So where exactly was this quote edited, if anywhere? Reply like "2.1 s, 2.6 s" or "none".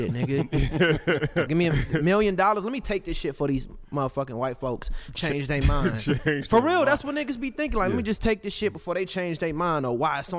1.5 s